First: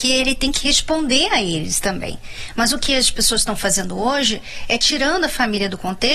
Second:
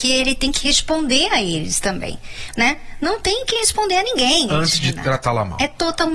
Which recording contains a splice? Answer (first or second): second